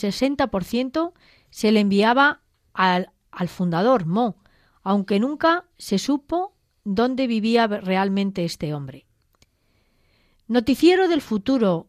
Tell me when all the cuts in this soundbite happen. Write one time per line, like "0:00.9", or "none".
none